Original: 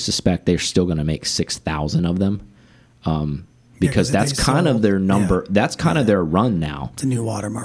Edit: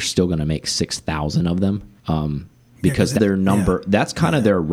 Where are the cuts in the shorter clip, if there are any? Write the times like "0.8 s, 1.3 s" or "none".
2.0 s, 3.2 s